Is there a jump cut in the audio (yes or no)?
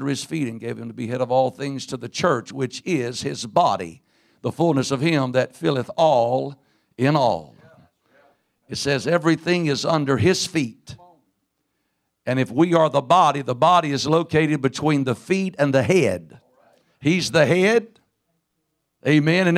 no